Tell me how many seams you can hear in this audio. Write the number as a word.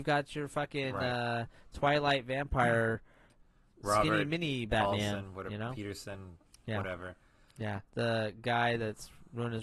one